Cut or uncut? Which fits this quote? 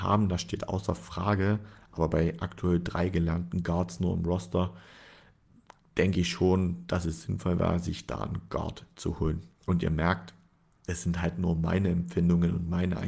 uncut